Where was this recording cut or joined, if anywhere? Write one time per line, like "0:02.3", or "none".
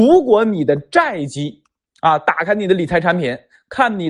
none